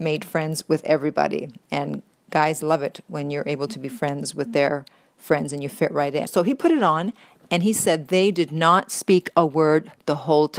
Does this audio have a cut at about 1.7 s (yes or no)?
no